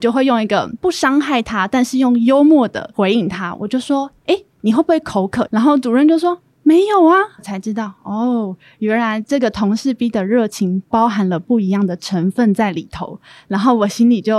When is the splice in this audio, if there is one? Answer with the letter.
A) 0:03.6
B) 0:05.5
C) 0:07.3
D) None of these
B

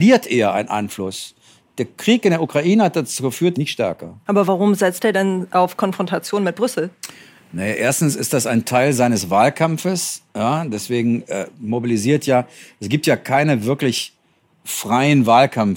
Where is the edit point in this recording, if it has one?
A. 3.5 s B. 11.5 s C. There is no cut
A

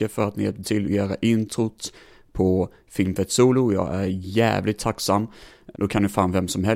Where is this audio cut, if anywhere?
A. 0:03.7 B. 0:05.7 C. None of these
B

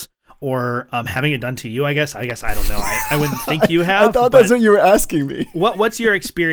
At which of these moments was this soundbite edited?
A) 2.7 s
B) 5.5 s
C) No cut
C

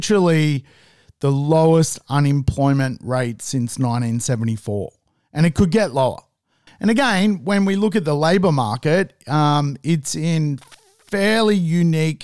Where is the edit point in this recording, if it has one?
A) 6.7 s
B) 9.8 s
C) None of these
A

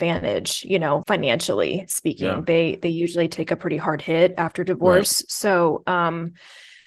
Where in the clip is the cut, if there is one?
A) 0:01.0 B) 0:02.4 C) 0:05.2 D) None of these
A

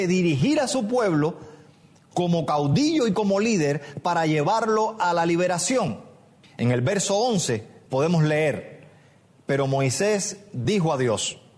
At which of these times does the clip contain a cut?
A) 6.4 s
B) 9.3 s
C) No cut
A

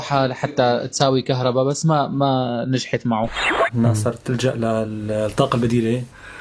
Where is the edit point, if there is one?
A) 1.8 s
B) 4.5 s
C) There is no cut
C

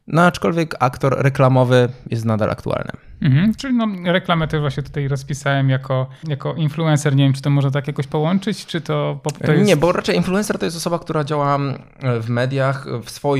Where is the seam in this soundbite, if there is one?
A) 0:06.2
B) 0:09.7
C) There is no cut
A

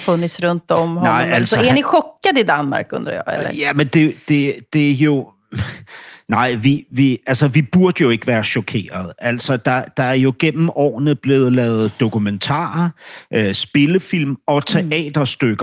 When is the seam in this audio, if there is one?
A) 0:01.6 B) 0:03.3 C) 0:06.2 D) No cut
D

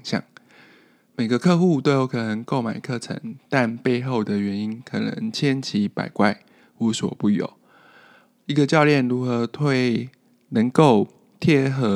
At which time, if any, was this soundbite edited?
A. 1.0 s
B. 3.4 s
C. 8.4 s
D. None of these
D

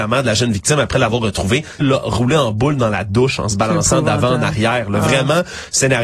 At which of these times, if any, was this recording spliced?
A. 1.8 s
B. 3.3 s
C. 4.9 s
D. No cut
A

